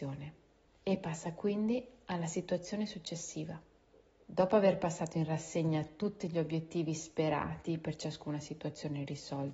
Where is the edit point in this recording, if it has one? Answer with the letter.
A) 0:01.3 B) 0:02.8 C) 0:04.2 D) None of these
C